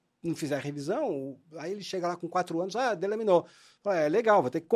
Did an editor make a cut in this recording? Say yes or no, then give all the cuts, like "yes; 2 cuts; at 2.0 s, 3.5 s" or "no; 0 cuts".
no; 0 cuts